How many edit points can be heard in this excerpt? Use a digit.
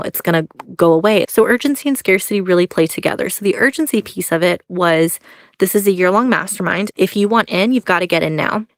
2